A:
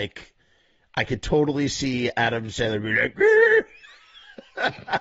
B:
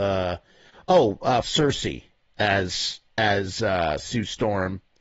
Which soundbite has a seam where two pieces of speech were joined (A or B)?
B